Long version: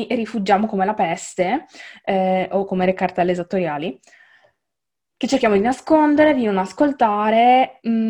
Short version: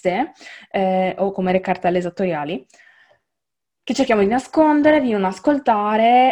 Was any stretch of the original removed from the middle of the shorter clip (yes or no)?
no